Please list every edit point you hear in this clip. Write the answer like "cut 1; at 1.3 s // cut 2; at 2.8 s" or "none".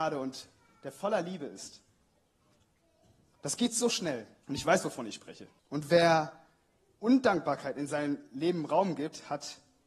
cut 1; at 4.4 s // cut 2; at 5.6 s